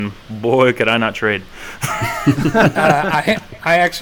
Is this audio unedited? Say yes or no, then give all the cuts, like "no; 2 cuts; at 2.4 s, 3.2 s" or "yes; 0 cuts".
yes; 0 cuts